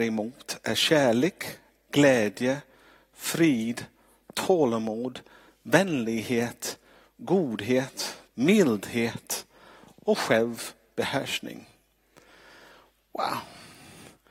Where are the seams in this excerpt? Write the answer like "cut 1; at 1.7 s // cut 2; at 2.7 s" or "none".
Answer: cut 1; at 8.3 s